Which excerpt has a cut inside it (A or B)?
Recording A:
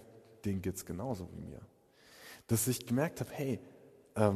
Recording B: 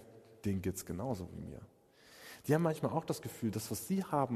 B